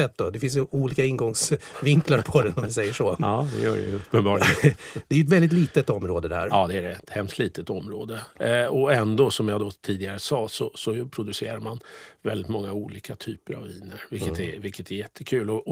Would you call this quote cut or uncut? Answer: uncut